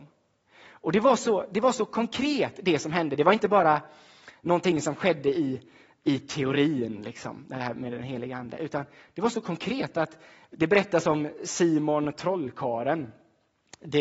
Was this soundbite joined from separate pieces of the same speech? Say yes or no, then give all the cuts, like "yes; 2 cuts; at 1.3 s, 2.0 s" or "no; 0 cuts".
no; 0 cuts